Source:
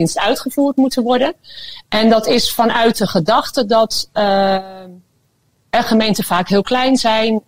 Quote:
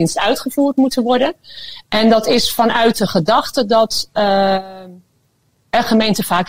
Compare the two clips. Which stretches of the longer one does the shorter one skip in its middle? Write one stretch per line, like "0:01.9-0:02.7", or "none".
none